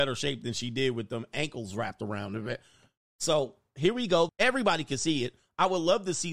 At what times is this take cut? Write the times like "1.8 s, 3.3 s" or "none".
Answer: 4.3 s